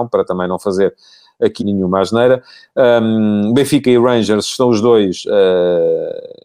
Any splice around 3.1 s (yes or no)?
no